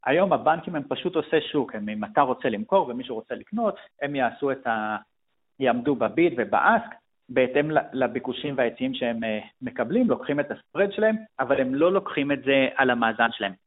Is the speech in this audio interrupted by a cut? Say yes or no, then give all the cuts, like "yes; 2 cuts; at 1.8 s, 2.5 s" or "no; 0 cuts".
no; 0 cuts